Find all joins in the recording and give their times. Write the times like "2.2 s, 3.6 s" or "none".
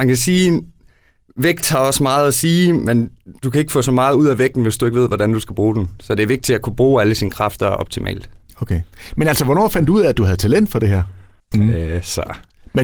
11.5 s